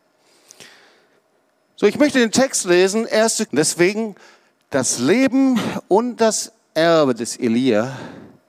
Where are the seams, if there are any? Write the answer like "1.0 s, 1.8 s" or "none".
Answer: 3.5 s